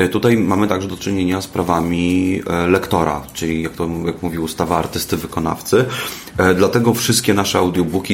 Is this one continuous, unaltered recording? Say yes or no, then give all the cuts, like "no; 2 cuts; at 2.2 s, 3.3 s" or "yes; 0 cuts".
yes; 0 cuts